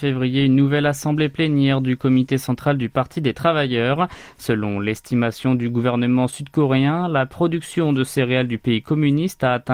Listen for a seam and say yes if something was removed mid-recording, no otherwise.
yes